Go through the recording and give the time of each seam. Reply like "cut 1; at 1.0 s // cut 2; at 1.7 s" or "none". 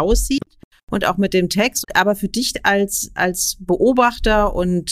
cut 1; at 1.8 s

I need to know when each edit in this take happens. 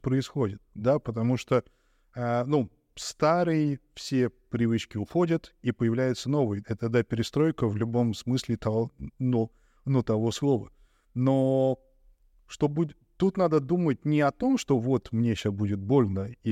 cut 1; at 6.6 s

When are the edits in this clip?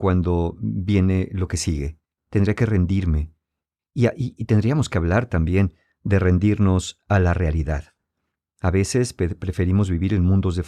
cut 1; at 2.2 s

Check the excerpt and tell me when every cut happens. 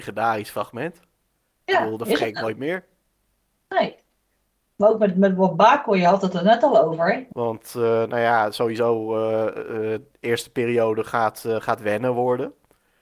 cut 1; at 7.3 s

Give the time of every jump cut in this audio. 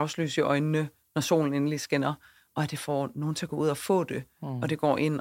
none

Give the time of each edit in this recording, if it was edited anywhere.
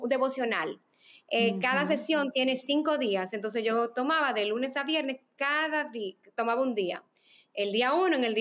none

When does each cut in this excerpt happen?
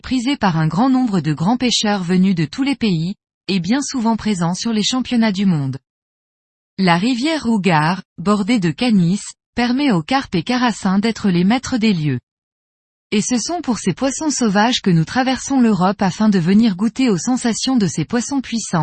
cut 1; at 6.6 s

